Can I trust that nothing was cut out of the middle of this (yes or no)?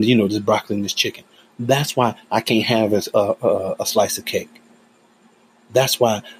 no